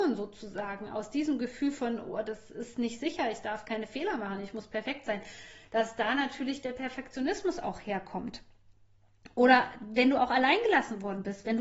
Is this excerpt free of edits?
yes; 0 cuts

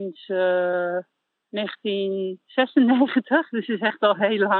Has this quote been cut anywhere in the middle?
no; 0 cuts

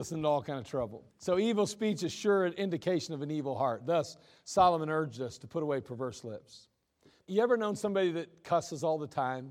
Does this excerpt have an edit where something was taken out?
yes; 2 cuts; at 1.1 s, 7.2 s

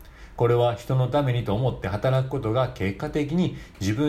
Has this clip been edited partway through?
no; 0 cuts

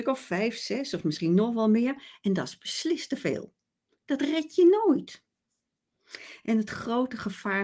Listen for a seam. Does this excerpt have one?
no; 0 cuts

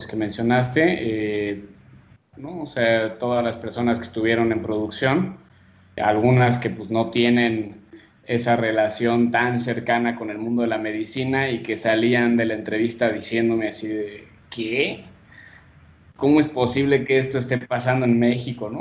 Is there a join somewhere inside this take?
yes; 2 cuts; at 2.3 s, 6.0 s

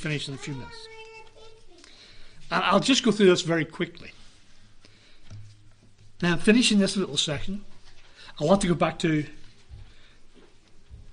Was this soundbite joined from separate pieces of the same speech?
yes; 1 cut; at 6.2 s

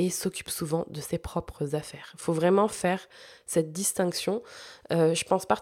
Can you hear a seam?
no; 0 cuts

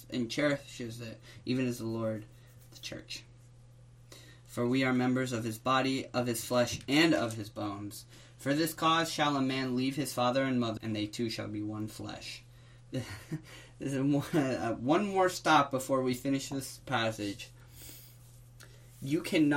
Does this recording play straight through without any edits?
no; 1 cut; at 10.8 s

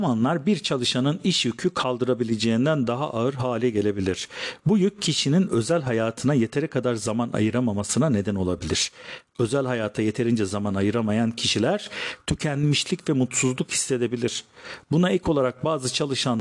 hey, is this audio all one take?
yes; 0 cuts

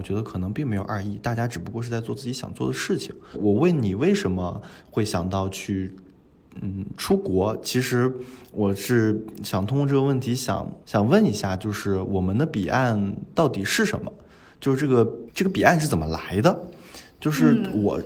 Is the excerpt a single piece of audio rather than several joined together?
yes; 0 cuts

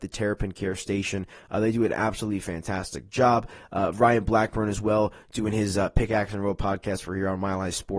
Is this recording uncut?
yes; 0 cuts

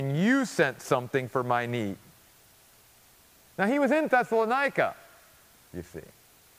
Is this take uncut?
no; 1 cut; at 5.7 s

